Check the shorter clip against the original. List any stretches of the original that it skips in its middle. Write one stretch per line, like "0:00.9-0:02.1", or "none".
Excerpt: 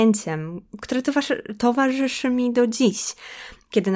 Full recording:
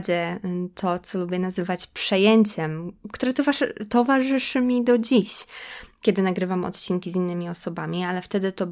none